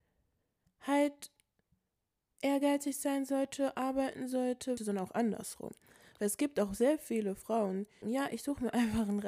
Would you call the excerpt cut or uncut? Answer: cut